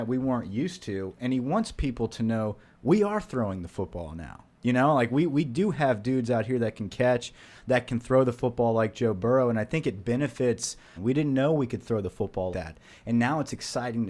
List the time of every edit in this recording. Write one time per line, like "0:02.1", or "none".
0:11.0
0:12.5